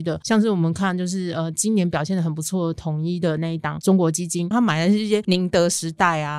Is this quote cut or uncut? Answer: cut